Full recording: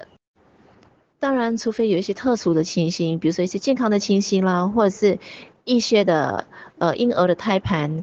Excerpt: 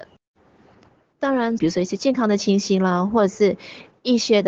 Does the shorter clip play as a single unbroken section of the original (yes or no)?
no